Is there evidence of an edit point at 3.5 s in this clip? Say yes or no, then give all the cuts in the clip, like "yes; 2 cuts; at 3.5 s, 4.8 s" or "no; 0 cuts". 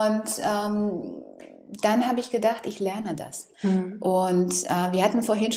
yes; 1 cut; at 3.5 s